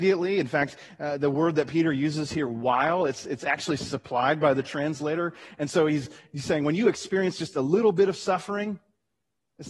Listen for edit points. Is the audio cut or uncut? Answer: uncut